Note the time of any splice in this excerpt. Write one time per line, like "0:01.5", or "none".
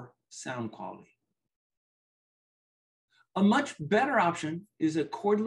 none